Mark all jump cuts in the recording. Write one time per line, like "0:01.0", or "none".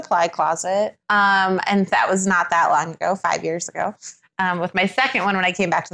0:01.0